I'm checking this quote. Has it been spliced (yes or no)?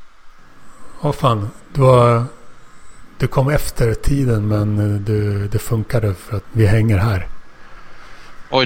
yes